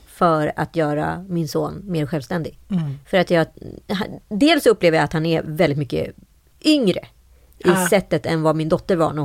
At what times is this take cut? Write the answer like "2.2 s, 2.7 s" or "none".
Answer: none